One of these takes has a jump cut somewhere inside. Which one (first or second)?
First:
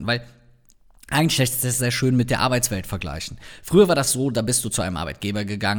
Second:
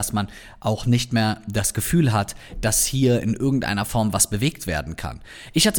first